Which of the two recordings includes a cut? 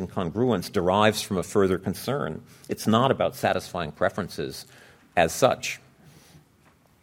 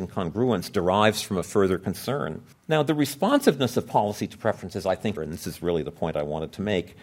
second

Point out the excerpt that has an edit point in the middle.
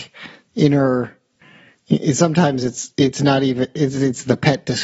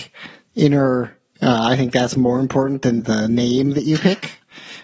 second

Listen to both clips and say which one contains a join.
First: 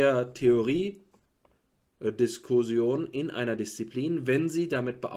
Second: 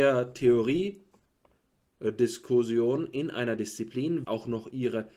second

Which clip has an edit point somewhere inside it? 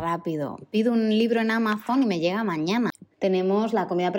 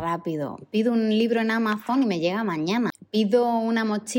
first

